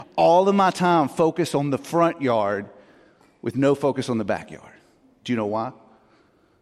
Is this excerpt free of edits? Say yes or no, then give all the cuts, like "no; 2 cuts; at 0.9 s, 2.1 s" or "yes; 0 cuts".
yes; 0 cuts